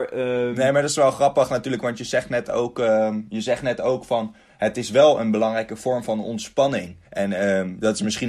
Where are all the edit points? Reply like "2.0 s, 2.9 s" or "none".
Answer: 7.1 s